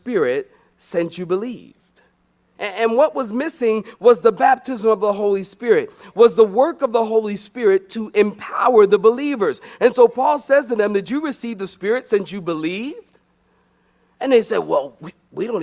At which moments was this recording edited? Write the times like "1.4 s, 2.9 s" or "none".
2.6 s